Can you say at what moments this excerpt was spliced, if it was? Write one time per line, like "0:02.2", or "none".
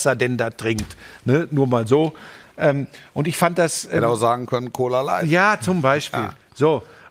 none